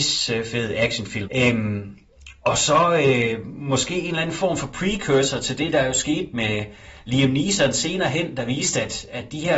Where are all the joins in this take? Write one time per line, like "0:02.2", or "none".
0:01.2
0:02.4